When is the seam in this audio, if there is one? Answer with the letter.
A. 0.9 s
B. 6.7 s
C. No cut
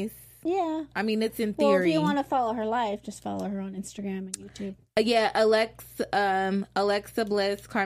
C